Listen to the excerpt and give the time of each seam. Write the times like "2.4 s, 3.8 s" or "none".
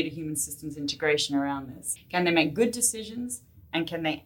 2.0 s